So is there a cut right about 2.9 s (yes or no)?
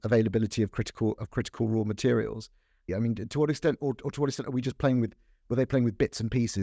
yes